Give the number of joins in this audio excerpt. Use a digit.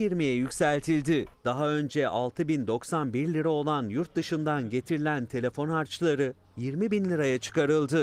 1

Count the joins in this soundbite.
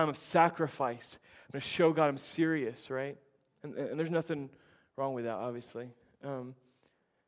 0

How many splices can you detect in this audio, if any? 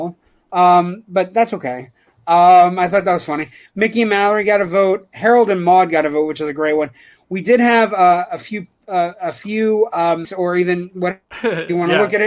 1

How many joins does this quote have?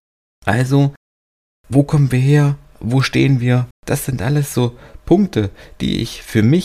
1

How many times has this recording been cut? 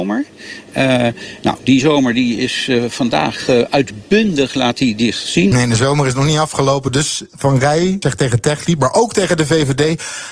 2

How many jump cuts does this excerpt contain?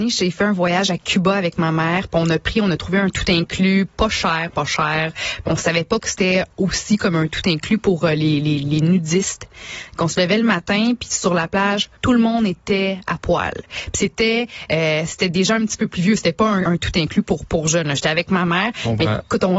2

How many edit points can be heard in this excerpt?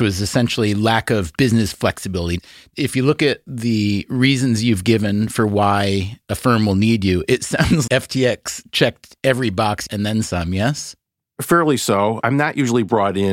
1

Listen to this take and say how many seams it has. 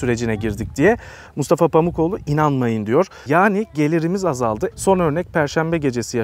2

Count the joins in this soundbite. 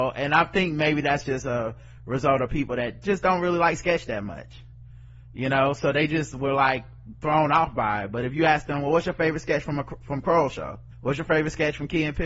1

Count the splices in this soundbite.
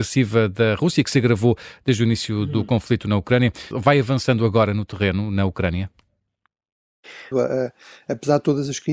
2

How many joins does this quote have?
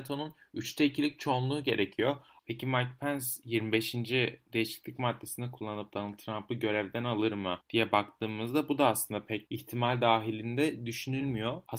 1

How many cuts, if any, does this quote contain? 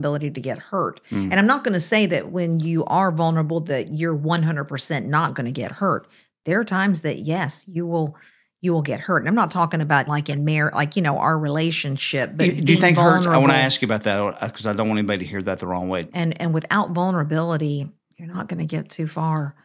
2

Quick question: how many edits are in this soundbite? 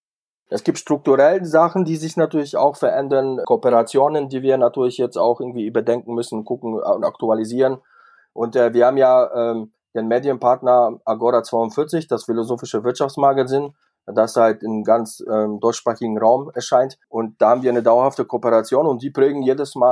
2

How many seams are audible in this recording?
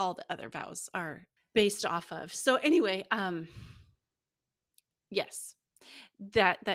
1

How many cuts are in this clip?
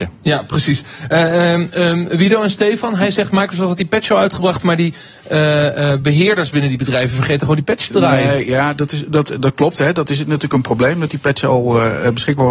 0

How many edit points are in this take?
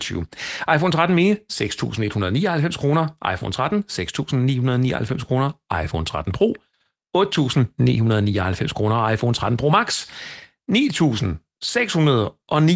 0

